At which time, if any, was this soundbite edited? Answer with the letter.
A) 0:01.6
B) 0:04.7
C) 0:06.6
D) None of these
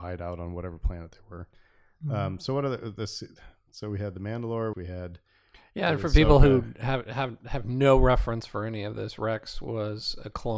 B